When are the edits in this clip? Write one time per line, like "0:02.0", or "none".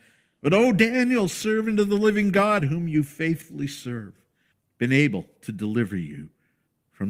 0:02.6